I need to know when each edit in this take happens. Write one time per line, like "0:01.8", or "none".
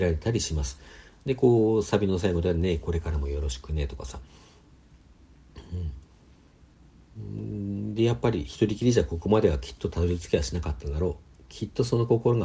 none